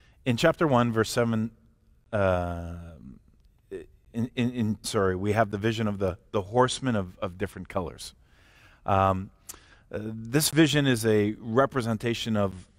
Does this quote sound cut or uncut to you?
cut